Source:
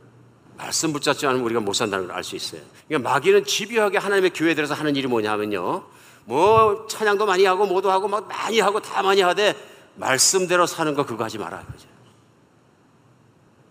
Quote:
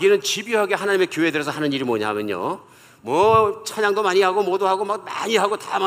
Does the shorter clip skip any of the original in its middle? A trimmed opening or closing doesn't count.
no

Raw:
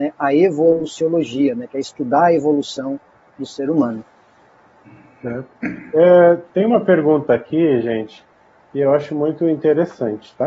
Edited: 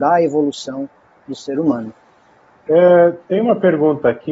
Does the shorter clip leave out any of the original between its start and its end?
yes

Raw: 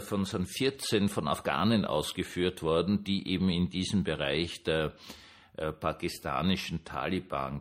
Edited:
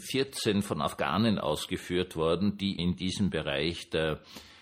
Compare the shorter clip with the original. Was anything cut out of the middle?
yes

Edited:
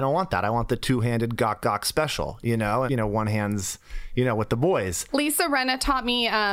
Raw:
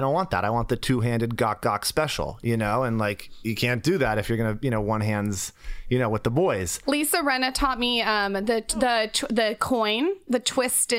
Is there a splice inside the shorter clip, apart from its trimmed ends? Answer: yes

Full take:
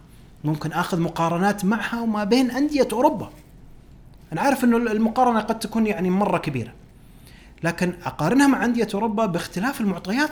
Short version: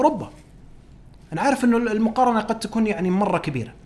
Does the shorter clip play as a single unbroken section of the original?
yes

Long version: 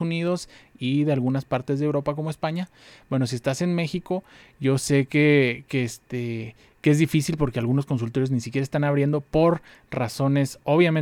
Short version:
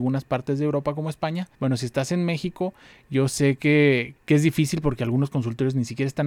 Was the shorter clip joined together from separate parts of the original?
yes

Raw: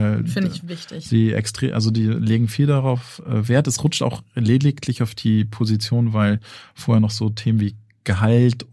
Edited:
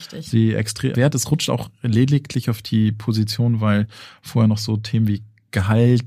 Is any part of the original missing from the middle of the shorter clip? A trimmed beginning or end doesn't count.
yes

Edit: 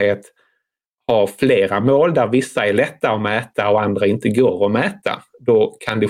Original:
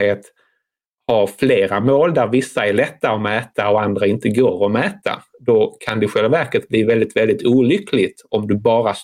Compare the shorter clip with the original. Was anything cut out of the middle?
no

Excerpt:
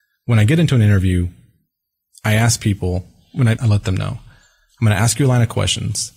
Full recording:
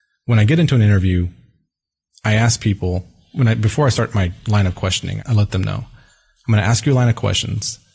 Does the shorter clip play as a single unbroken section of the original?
no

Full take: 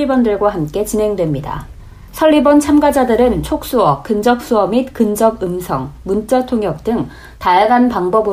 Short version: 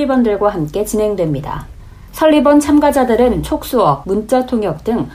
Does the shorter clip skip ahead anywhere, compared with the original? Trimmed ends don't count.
yes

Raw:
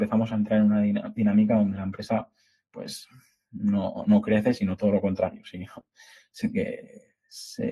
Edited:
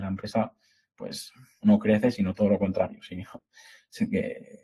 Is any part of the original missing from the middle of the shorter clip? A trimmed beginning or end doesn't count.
yes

